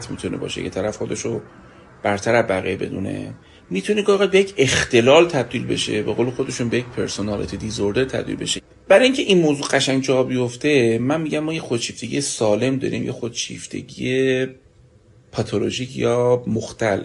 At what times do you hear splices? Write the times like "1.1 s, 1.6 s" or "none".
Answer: none